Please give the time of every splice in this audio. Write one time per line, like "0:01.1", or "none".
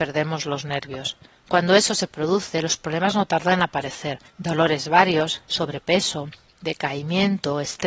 0:01.3
0:04.3
0:05.4